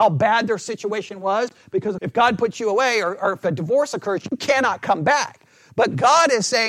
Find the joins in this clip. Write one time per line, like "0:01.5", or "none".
0:02.0